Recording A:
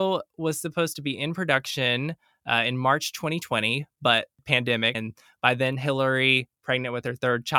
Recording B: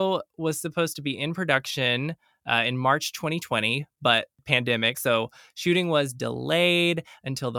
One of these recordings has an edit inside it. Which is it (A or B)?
A